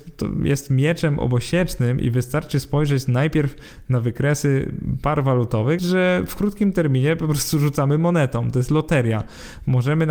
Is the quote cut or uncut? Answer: cut